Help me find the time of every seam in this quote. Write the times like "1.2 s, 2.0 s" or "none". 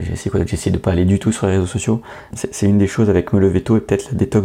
2.3 s